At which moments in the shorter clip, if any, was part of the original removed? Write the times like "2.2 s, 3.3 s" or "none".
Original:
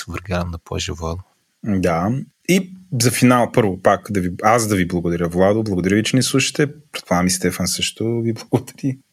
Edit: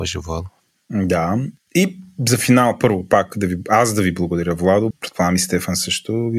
4.9 s